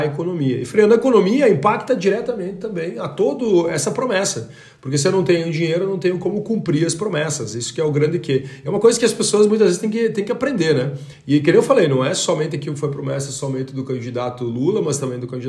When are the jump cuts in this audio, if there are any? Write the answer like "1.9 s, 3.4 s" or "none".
none